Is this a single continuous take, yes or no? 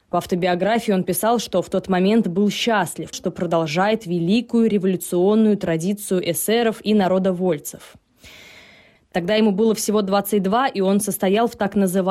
no